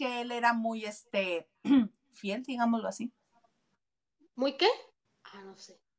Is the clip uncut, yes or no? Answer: no